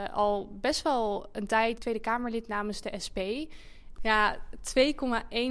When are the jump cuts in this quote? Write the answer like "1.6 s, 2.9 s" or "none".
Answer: 1.8 s, 4.0 s